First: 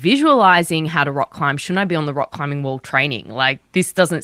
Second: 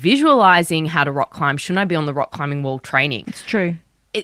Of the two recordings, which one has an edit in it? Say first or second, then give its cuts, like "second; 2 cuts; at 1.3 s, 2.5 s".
second; 1 cut; at 3.2 s